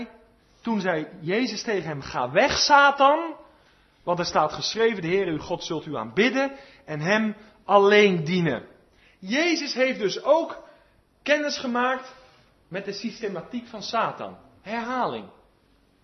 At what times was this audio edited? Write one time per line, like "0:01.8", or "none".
none